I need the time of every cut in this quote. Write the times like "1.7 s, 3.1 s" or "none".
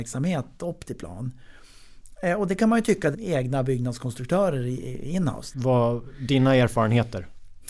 3.1 s, 5.5 s